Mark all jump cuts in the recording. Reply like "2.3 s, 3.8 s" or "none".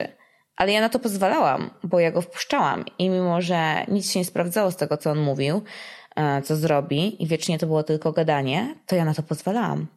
none